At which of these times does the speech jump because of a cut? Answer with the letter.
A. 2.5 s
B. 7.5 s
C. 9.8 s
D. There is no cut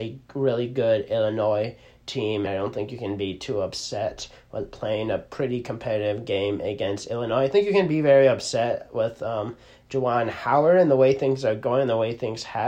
A